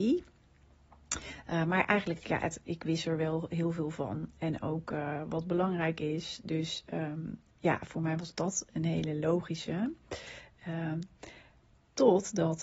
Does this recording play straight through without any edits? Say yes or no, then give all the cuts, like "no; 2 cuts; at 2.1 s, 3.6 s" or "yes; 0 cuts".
yes; 0 cuts